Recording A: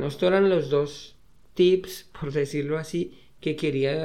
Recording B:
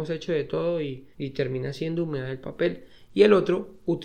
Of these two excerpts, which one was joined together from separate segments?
B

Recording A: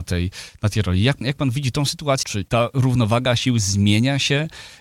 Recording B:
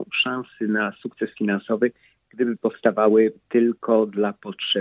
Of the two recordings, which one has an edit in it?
A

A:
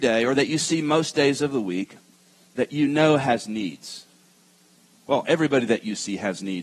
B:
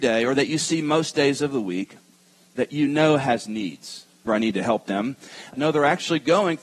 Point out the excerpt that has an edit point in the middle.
B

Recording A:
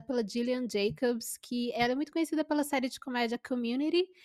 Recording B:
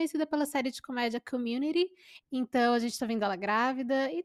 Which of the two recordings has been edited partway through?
B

